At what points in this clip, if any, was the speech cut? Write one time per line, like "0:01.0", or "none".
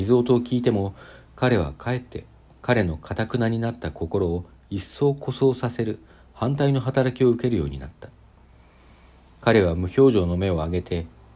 none